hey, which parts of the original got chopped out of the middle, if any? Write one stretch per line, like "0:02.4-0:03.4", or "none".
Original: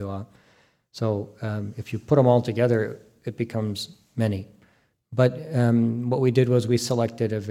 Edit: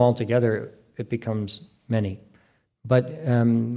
none